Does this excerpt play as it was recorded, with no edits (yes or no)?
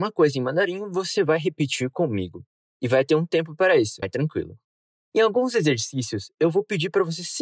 no